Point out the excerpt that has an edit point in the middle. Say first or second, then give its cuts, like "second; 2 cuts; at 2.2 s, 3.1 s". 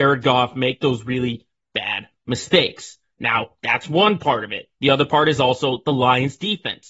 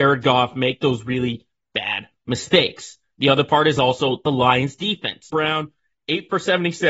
second; 2 cuts; at 3.1 s, 5.3 s